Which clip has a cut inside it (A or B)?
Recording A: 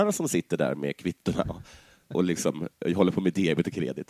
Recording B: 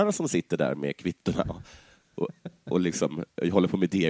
A